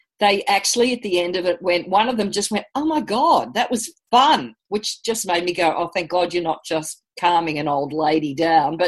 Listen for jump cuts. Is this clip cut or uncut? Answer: uncut